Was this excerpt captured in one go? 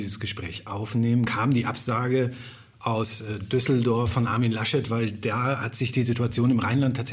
yes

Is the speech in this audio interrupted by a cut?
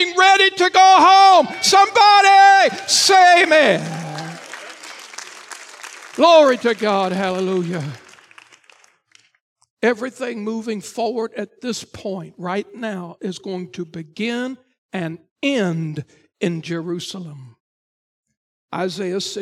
no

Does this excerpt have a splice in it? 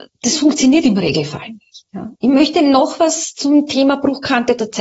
yes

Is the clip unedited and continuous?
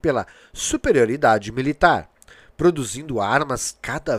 yes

